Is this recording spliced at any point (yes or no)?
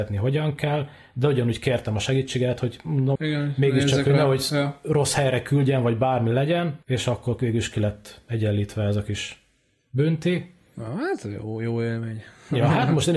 yes